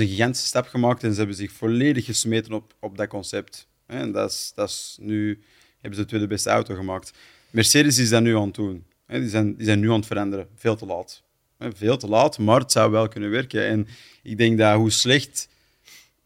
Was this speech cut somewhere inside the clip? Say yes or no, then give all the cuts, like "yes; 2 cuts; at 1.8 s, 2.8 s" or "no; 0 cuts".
no; 0 cuts